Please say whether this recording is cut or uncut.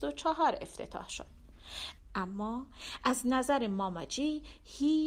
cut